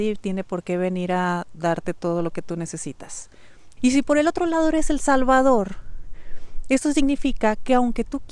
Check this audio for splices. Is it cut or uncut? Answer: cut